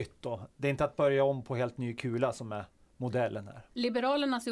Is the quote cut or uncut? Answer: uncut